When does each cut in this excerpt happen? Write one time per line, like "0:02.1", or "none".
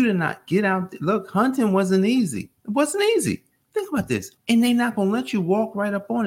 0:02.6
0:04.4